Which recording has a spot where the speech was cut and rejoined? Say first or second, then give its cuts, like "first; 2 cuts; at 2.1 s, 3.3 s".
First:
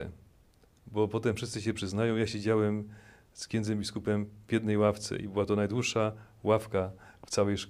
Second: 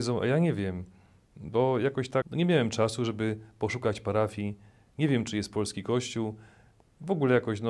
second; 1 cut; at 2.2 s